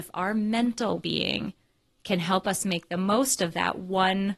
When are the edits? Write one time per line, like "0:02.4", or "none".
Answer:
0:01.0